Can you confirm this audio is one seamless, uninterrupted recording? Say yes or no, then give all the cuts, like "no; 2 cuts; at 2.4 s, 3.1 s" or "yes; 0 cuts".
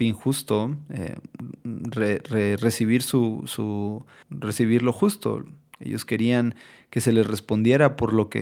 no; 1 cut; at 4.2 s